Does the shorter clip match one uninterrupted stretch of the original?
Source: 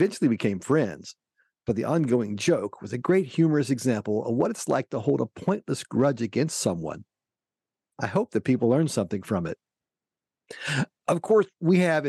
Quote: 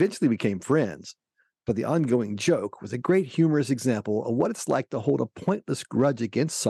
yes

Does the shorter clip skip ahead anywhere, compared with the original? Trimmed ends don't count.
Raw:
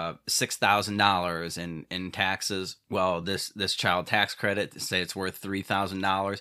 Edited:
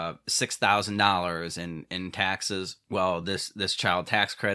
no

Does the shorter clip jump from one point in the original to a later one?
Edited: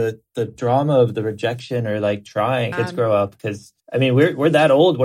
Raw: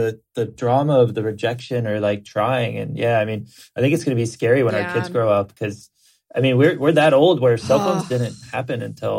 yes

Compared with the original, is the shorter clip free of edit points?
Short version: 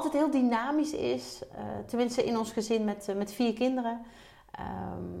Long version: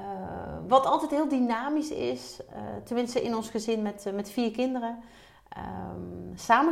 yes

